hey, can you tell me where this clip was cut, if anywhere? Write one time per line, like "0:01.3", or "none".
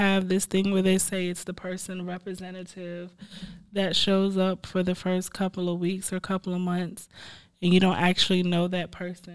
none